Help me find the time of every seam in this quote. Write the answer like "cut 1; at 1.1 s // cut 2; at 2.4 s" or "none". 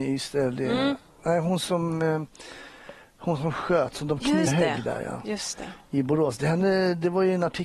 cut 1; at 4.5 s